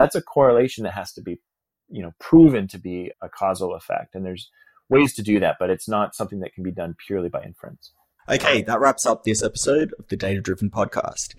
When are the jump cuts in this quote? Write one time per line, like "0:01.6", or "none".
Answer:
0:03.1